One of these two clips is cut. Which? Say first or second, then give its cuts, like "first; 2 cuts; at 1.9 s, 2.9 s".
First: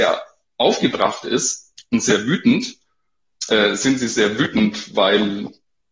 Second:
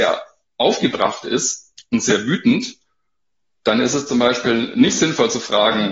first; 1 cut; at 3.4 s